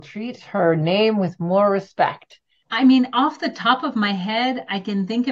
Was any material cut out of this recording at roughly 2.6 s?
yes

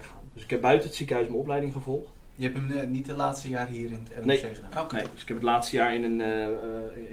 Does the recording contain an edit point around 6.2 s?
no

